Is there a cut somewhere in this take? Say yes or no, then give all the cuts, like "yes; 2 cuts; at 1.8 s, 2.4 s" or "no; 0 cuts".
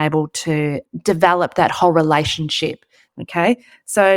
yes; 1 cut; at 3.1 s